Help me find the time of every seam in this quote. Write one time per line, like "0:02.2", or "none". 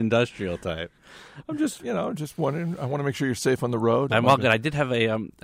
0:04.1